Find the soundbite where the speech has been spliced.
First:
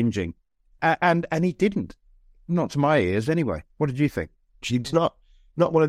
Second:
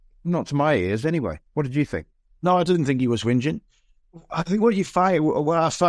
first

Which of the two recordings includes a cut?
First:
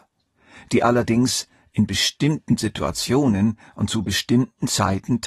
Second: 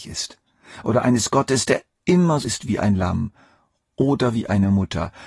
second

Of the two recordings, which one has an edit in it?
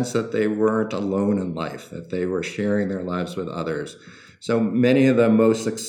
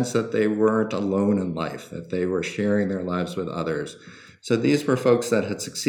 second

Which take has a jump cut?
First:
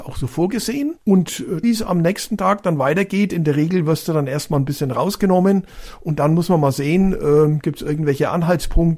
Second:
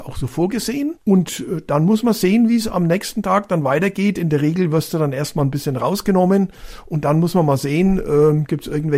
first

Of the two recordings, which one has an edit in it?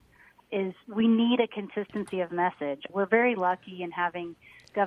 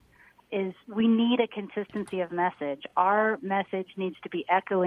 first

